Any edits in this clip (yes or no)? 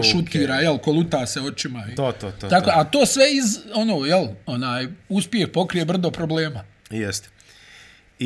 no